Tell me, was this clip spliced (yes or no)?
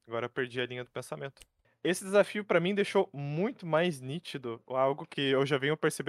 yes